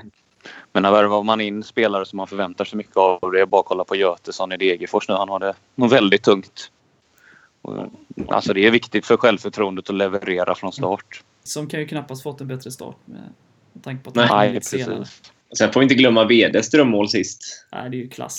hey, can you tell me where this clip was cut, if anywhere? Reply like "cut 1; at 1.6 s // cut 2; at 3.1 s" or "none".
cut 1; at 11.5 s // cut 2; at 15.4 s